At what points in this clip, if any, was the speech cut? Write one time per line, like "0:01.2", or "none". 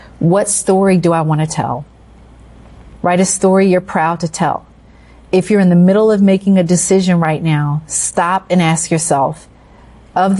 0:03.0